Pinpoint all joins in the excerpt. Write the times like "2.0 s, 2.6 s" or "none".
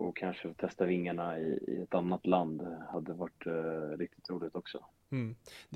none